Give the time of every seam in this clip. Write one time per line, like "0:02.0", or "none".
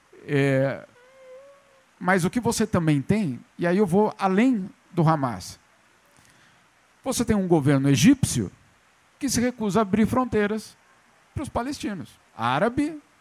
0:12.3